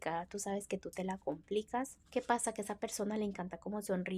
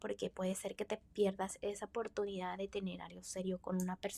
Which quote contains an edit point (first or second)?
first